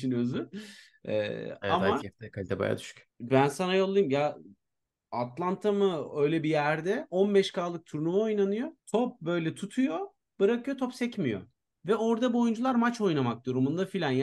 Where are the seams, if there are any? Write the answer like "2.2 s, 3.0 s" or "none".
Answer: 3.1 s, 8.8 s